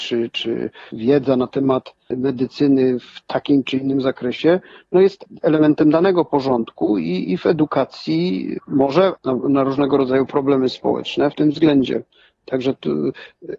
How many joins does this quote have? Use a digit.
2